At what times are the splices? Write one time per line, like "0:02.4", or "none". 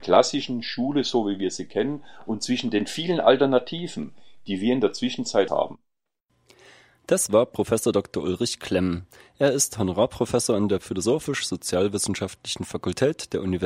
none